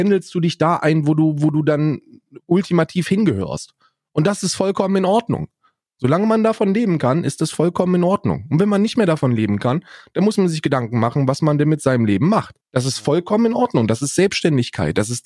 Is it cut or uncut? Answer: cut